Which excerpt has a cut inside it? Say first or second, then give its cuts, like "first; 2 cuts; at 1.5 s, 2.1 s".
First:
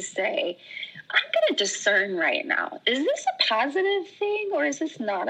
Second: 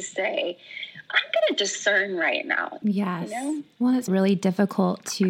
second; 2 cuts; at 2.8 s, 4.1 s